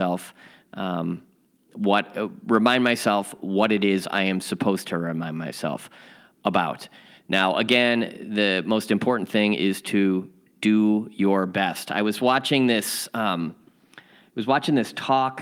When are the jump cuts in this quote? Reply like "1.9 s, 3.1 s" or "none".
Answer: none